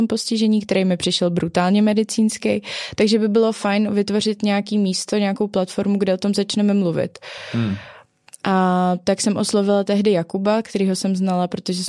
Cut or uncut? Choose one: uncut